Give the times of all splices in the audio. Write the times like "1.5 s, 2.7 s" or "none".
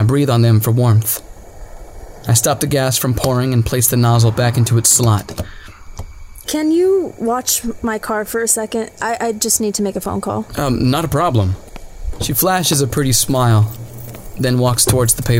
6.4 s